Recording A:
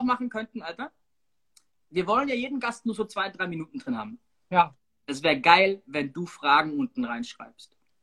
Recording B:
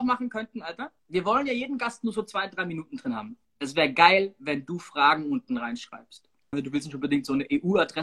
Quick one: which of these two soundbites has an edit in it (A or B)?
B